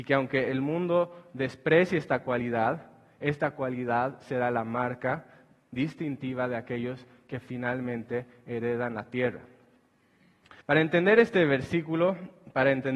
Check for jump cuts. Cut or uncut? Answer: cut